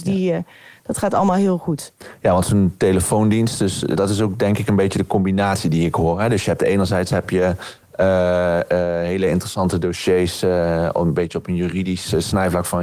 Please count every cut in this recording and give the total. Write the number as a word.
one